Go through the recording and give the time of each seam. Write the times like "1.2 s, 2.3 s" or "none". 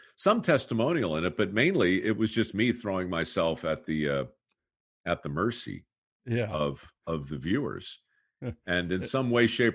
none

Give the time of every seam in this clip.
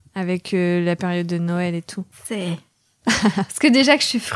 2.1 s

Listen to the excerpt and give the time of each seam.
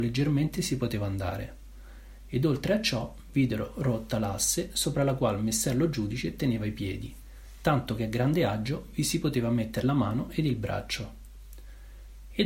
none

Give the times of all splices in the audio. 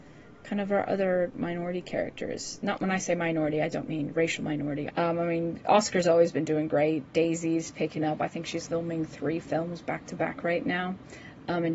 4.9 s, 8.7 s

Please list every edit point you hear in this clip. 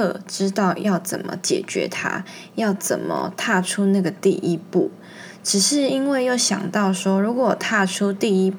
none

